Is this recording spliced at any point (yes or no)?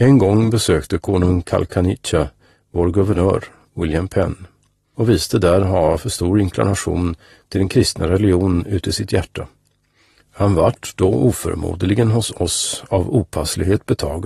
no